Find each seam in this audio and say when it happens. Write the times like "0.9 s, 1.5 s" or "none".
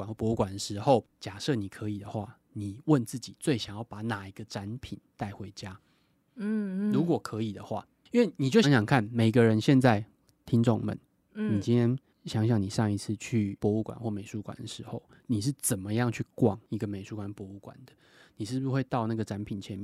8.6 s